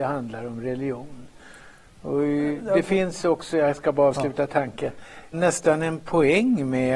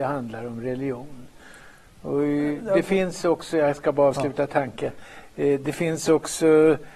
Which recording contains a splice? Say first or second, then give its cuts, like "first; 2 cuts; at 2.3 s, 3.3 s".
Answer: first; 1 cut; at 5.3 s